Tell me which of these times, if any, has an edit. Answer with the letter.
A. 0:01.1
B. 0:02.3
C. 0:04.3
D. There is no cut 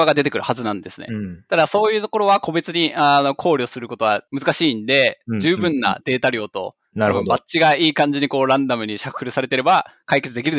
C